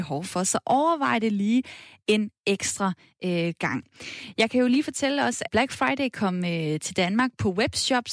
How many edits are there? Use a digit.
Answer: 1